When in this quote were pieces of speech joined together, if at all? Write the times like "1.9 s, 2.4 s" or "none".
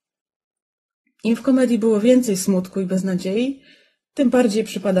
none